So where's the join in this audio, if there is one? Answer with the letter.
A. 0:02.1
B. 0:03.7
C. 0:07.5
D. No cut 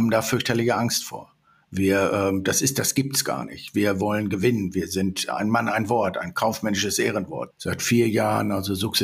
C